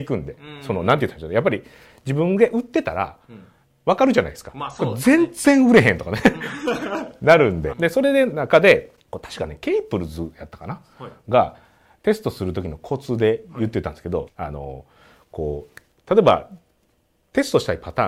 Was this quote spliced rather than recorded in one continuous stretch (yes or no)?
yes